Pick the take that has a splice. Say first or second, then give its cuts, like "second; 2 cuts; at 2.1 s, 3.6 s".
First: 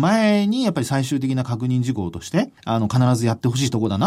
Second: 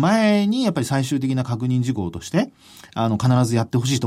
first; 1 cut; at 2.6 s